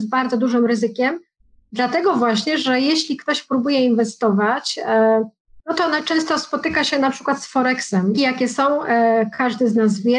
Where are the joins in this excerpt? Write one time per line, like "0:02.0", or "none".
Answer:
0:08.1

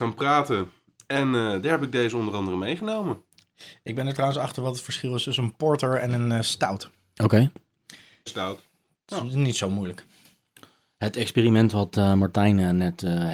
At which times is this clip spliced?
0:08.3

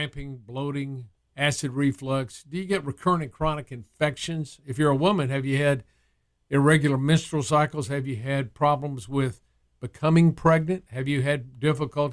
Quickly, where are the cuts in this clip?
0:01.2

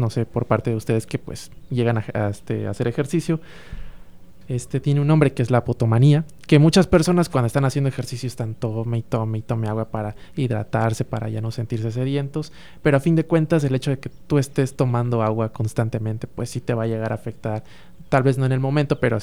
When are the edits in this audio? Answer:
0:04.4
0:06.5

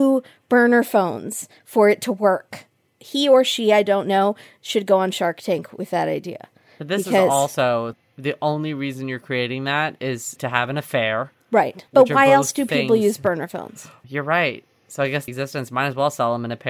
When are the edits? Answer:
0:11.9
0:15.3

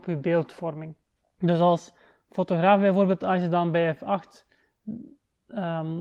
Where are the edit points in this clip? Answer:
none

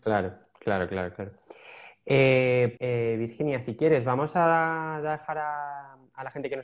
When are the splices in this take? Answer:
0:02.8

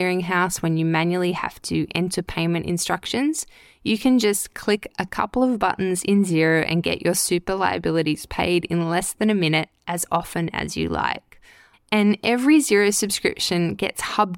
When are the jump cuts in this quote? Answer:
0:11.7

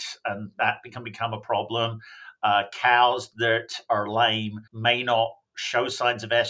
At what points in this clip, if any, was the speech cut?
0:04.7

